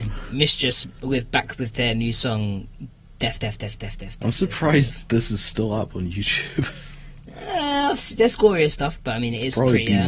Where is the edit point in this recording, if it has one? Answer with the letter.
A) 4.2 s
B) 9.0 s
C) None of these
B